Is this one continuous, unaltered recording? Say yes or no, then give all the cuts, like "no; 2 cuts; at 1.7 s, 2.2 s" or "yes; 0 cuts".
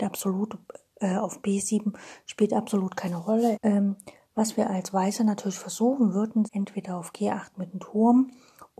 no; 2 cuts; at 3.5 s, 6.5 s